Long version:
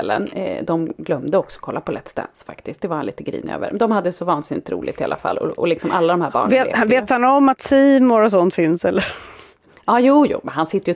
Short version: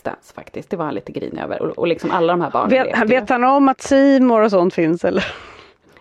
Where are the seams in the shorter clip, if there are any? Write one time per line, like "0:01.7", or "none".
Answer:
0:01.6